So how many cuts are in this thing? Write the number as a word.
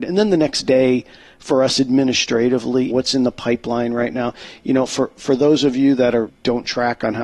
two